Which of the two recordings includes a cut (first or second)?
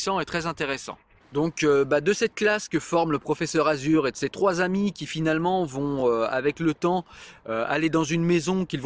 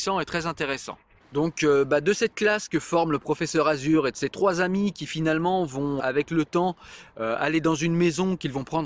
second